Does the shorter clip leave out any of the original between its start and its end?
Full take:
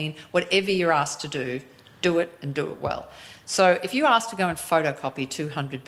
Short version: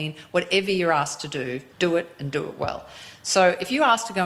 yes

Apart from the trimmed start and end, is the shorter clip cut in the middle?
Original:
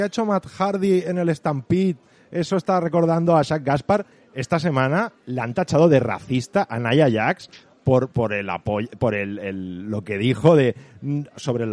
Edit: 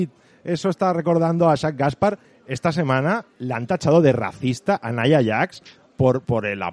no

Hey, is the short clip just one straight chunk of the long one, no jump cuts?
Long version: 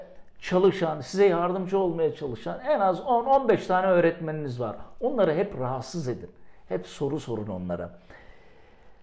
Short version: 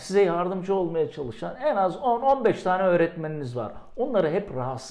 yes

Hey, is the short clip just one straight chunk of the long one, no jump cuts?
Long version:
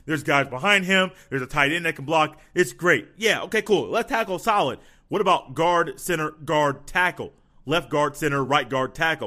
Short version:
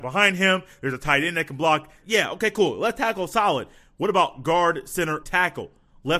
no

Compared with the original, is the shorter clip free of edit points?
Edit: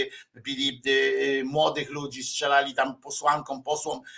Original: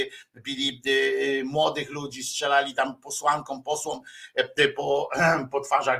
yes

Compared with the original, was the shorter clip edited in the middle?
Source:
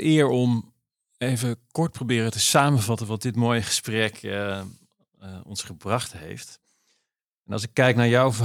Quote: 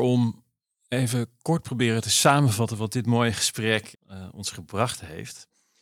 yes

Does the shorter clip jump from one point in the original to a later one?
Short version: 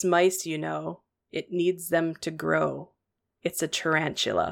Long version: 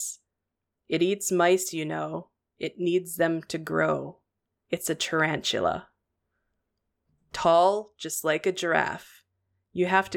no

